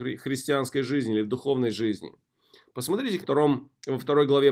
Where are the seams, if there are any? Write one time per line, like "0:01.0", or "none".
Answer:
0:03.2